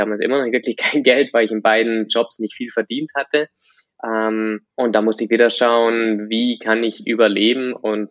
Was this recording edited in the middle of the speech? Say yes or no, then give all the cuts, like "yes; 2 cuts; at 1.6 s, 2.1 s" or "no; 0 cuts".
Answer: yes; 1 cut; at 4.7 s